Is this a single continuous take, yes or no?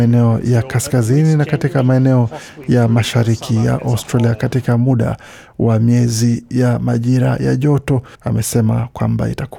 no